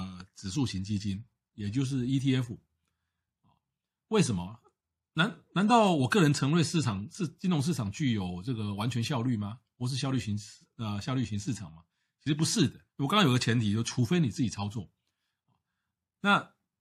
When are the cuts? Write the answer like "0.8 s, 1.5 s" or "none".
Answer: 12.9 s

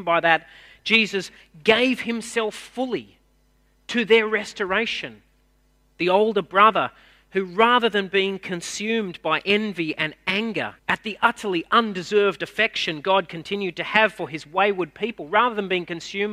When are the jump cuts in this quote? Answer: 5.9 s, 10.8 s

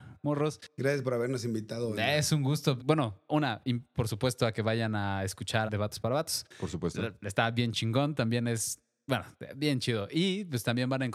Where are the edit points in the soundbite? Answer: 2.8 s, 3.9 s, 5.7 s

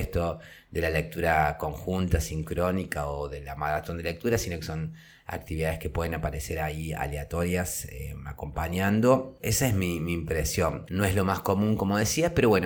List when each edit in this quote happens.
9.4 s, 10.9 s

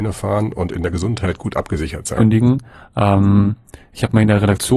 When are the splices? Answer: 2.2 s

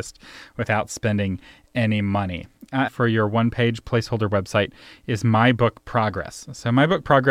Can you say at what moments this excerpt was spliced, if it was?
2.9 s

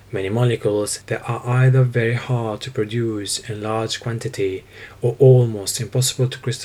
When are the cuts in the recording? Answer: 1.0 s

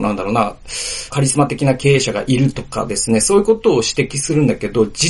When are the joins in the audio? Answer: 1.1 s

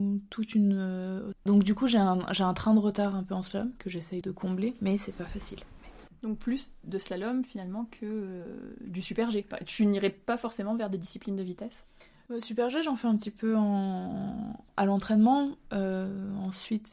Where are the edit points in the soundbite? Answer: 1.3 s, 4.2 s

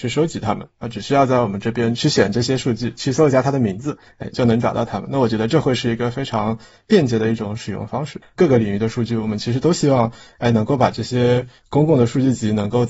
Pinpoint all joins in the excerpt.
4.3 s, 8.2 s

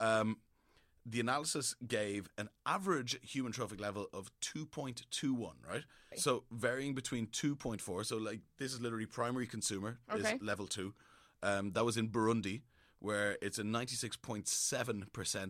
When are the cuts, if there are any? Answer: 6.1 s

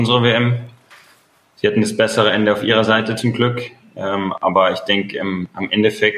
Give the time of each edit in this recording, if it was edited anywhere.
none

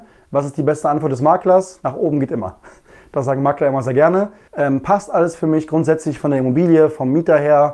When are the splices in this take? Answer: 4.5 s

